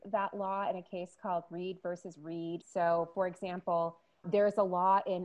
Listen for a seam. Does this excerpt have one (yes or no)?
yes